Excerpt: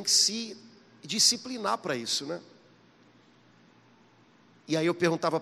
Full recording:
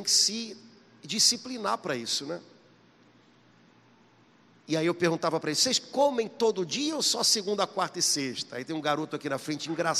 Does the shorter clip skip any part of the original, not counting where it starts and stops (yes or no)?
no